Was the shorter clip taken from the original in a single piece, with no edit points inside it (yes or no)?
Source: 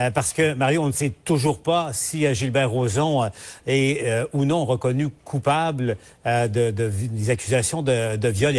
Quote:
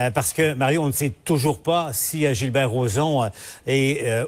yes